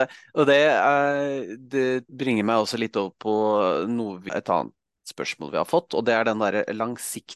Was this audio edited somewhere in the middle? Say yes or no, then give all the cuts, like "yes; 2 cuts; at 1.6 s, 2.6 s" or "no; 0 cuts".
yes; 2 cuts; at 2.1 s, 4.3 s